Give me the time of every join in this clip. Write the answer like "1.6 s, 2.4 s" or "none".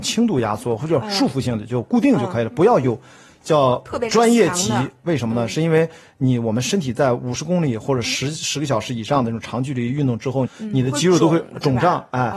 5.1 s, 10.4 s

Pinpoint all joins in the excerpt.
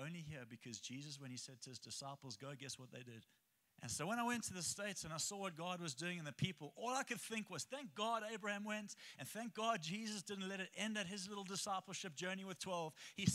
3.6 s

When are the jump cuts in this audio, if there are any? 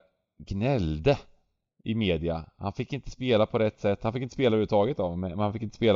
none

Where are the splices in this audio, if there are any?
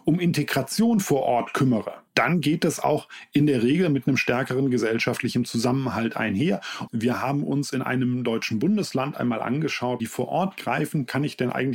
2.1 s, 6.9 s, 10.0 s

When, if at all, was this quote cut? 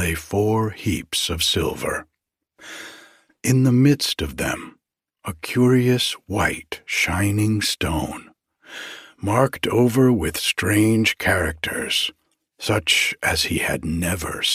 none

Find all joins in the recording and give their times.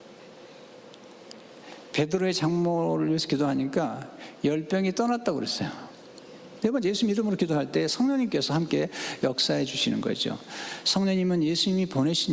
6.6 s

